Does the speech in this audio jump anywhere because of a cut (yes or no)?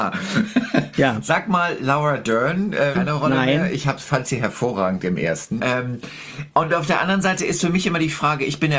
yes